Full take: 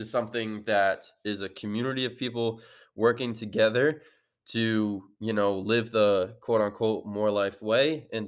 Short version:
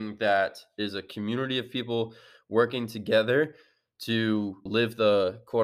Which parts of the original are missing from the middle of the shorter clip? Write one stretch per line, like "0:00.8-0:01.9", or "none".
0:05.1-0:05.6